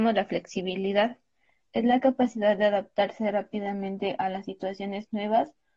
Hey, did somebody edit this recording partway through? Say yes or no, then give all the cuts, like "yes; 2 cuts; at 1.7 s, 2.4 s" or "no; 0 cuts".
no; 0 cuts